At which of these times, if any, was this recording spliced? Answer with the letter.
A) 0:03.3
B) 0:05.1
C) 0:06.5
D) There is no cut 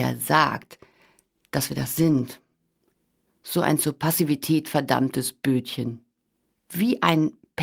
C